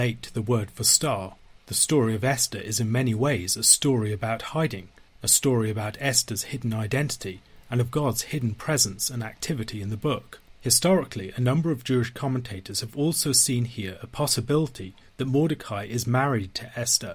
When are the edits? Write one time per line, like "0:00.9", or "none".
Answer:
0:01.6